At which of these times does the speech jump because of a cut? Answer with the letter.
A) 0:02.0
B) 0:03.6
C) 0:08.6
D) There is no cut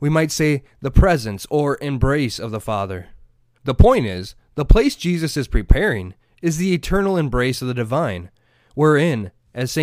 D